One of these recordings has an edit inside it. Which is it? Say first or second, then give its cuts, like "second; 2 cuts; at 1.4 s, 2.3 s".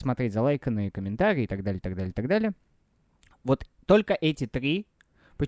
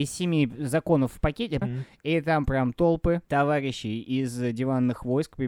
second; 2 cuts; at 1.6 s, 3.2 s